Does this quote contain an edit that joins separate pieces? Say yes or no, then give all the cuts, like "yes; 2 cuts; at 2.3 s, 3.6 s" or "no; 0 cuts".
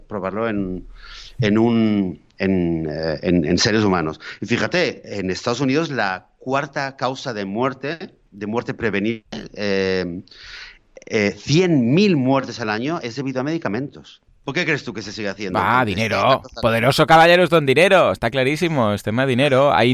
no; 0 cuts